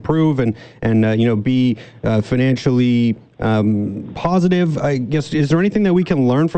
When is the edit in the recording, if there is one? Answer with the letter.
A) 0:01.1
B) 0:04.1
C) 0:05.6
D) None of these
B